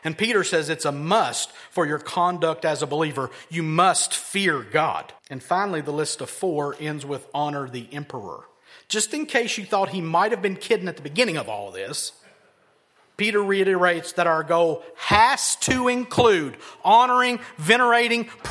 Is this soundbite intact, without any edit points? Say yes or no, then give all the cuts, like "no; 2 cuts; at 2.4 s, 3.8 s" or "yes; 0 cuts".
no; 1 cut; at 5.2 s